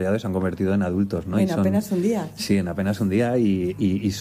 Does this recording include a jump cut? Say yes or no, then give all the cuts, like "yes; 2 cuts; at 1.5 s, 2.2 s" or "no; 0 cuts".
no; 0 cuts